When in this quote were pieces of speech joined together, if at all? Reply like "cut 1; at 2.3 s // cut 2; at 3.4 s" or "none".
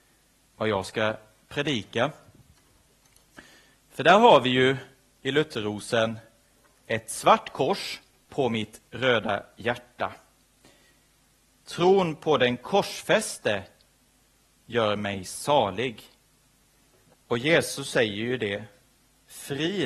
cut 1; at 8.3 s // cut 2; at 17.1 s